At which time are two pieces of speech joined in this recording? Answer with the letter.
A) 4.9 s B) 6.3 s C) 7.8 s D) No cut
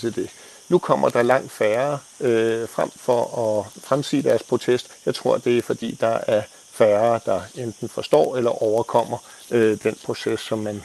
A